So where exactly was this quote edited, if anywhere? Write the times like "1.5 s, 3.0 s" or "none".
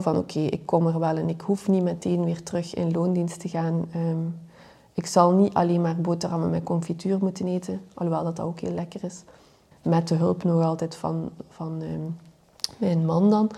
9.7 s